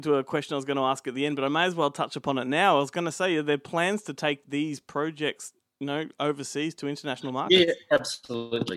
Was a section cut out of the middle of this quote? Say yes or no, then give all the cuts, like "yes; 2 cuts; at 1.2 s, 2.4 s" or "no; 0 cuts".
no; 0 cuts